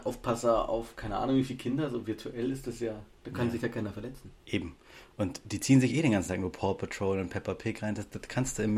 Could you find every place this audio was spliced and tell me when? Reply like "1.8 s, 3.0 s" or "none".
4.4 s